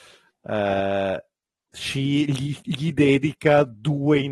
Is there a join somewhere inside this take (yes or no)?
no